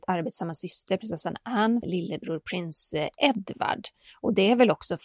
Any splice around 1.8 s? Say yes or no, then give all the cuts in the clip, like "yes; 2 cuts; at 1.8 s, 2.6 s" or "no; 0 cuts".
yes; 1 cut; at 1.8 s